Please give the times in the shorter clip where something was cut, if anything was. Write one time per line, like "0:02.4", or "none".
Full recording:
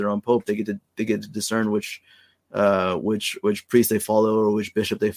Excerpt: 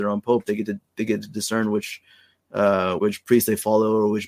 0:03.0